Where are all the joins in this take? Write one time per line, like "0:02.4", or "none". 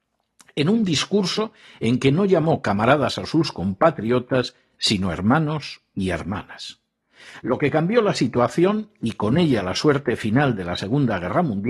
0:07.4